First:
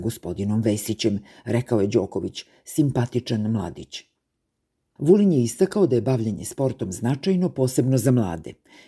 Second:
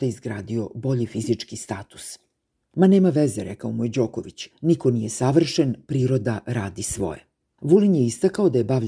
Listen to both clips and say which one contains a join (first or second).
second